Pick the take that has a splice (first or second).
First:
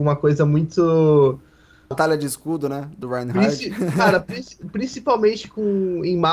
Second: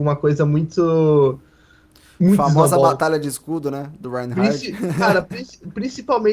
first